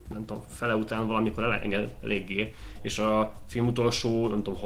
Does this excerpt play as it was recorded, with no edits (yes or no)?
yes